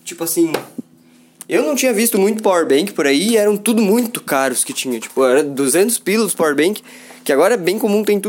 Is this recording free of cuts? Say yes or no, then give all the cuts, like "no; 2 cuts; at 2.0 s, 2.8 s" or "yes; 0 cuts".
yes; 0 cuts